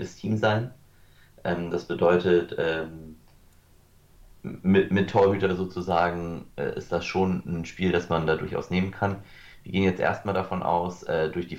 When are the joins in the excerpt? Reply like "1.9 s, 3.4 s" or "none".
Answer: none

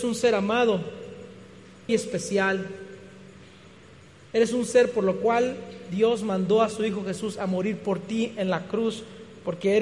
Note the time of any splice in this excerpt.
1.9 s

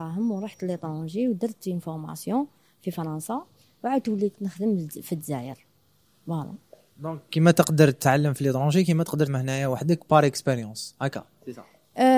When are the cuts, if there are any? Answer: 9.3 s

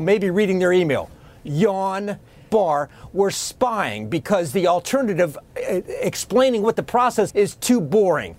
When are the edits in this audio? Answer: 2.5 s, 7.3 s

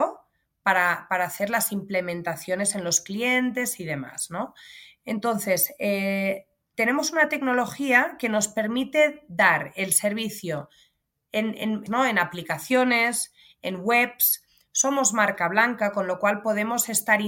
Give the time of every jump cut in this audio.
11.9 s

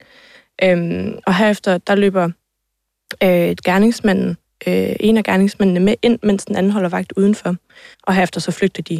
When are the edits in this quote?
7.9 s

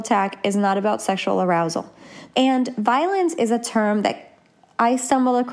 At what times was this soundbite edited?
2.3 s

